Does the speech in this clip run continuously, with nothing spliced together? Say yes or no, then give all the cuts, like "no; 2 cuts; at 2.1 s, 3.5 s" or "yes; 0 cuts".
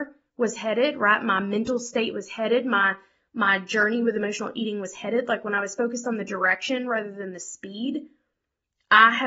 yes; 0 cuts